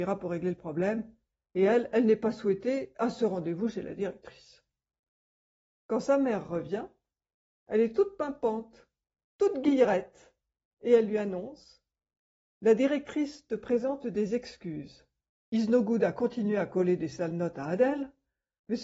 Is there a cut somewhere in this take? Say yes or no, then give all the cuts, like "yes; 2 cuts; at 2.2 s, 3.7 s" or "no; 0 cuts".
yes; 1 cut; at 15.3 s